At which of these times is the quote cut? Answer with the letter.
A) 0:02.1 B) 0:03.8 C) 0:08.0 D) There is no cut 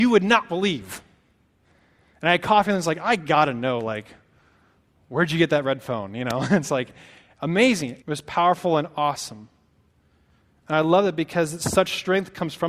C